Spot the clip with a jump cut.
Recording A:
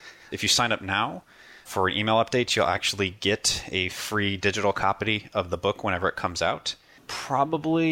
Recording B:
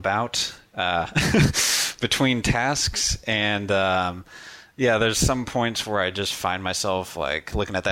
A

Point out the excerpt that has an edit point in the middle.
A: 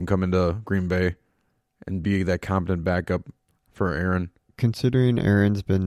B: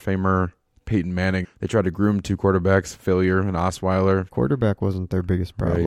B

